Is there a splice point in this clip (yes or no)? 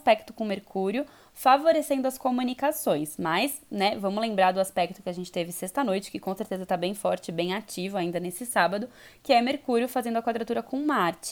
no